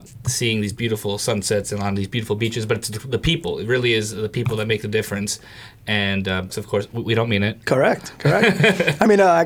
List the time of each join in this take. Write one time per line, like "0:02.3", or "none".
0:06.5
0:07.6